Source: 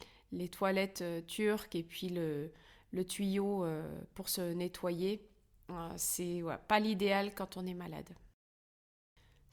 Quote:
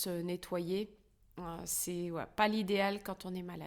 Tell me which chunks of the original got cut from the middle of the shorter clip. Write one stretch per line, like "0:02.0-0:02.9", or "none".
none